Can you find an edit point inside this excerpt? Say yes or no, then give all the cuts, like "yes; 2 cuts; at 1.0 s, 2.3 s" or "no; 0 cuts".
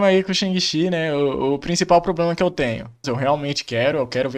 yes; 1 cut; at 3.0 s